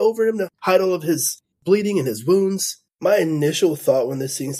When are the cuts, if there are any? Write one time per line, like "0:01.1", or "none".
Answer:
0:02.9